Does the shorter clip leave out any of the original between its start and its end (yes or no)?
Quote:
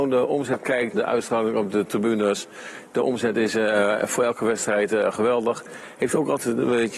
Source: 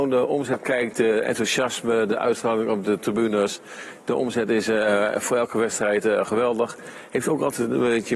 yes